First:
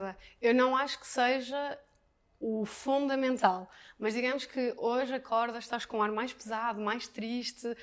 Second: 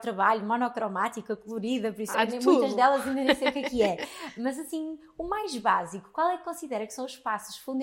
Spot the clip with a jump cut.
second; 1 cut; at 2.1 s

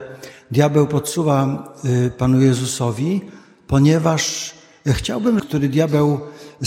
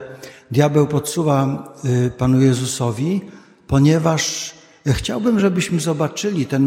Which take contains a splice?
first; 1 cut; at 5.4 s

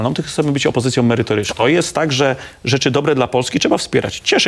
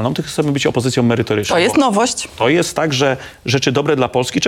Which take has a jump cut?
first; 1 cut; at 1.5 s

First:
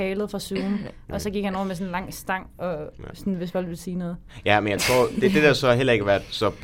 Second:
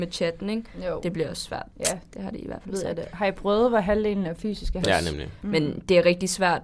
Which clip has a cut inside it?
second; 2 cuts; at 2.1 s, 4.8 s

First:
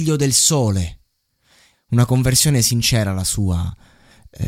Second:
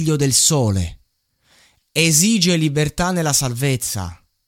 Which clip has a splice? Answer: first; 1 cut; at 1.7 s

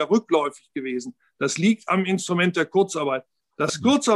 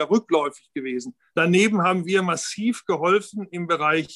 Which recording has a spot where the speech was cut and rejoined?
second; 1 cut; at 1.3 s

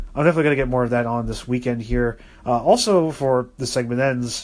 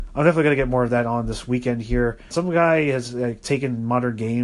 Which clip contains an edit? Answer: second; 1 cut; at 2.3 s

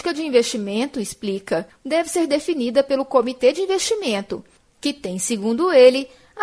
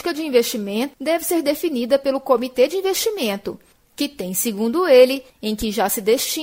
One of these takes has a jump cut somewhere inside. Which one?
second; 2 cuts; at 0.9 s, 5.3 s

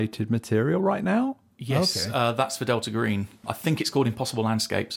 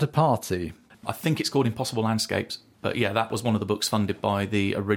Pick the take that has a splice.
second; 1 cut; at 0.9 s

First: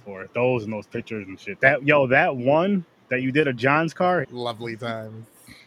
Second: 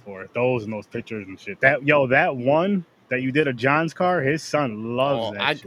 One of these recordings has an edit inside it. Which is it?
first; 1 cut; at 4.2 s

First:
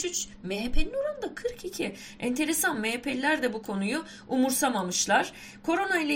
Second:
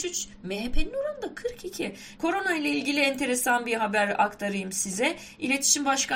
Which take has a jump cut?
second; 1 cut; at 2.2 s

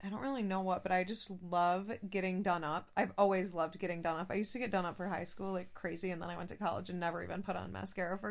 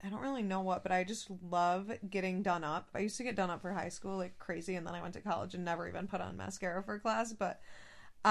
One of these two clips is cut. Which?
second; 1 cut; at 2.9 s

